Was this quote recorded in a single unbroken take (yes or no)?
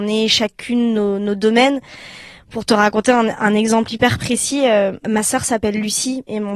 yes